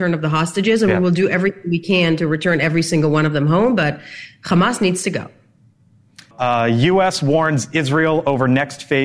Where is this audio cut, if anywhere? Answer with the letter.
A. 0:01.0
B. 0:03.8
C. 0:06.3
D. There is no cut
C